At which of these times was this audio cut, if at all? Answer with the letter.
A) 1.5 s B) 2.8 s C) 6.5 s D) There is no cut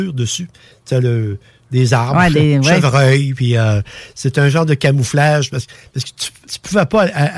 C